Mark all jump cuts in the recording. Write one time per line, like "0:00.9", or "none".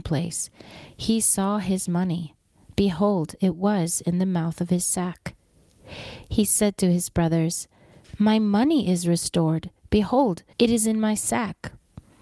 0:10.5